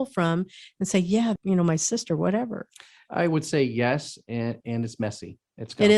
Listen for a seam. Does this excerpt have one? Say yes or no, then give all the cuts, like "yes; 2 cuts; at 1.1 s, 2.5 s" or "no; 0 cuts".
yes; 2 cuts; at 1.4 s, 4.6 s